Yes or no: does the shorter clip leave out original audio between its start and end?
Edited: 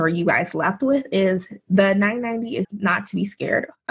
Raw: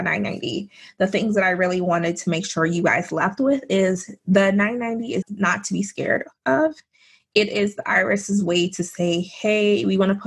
no